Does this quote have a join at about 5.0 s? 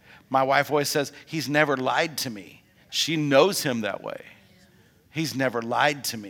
no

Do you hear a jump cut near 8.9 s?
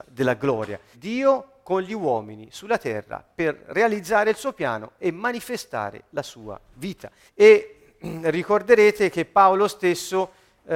no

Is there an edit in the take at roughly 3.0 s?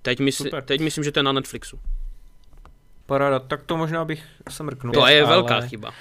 yes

